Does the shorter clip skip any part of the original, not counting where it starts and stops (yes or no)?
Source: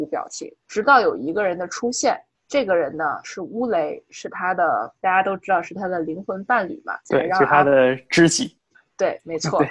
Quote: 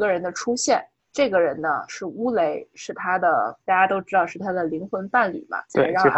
no